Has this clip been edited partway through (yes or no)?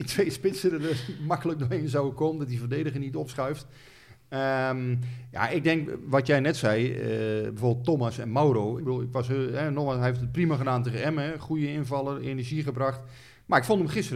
yes